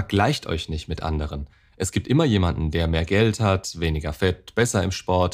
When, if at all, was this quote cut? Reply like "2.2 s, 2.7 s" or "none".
none